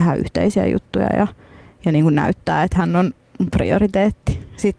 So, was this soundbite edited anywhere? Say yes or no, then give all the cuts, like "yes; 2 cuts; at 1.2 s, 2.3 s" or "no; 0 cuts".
no; 0 cuts